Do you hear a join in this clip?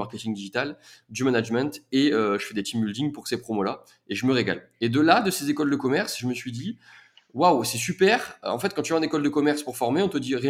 no; 0 cuts

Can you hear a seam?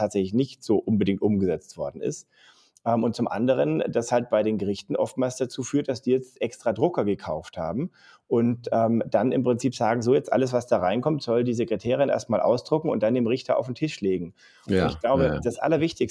no; 0 cuts

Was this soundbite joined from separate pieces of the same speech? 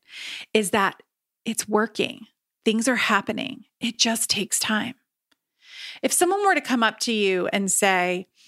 no; 0 cuts

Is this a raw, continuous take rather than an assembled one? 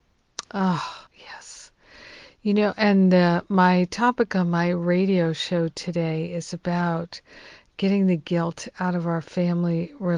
no; 1 cut; at 1.1 s

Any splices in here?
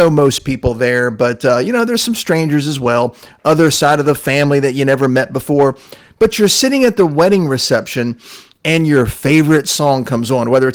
no; 0 cuts

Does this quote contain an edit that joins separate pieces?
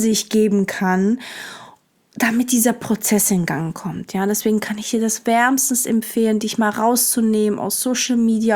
no; 0 cuts

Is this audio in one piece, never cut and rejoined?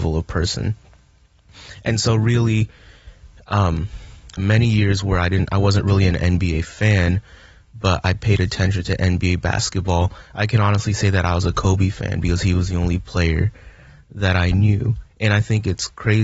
no; 1 cut; at 4.4 s

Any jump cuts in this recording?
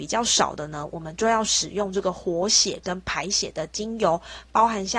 no; 0 cuts

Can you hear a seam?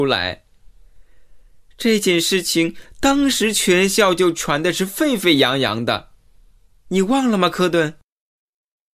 no; 0 cuts

